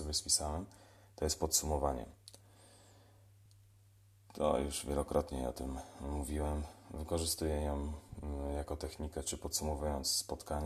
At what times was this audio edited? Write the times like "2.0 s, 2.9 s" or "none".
none